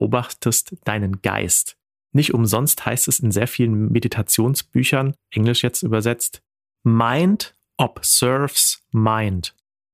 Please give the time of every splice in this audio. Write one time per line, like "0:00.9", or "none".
0:05.2